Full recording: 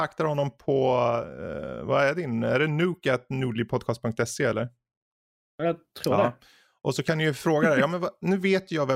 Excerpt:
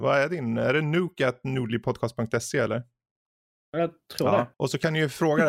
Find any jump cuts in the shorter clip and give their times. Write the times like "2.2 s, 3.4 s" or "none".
4.5 s